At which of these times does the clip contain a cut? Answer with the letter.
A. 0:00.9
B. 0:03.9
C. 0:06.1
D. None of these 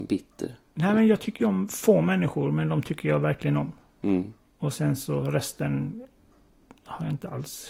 D